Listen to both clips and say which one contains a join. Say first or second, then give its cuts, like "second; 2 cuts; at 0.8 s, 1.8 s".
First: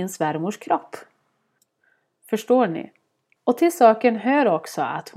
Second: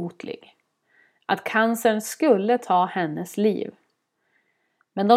first; 1 cut; at 3.4 s